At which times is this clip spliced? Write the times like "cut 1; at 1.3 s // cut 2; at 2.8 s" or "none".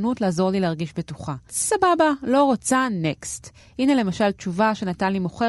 cut 1; at 1.5 s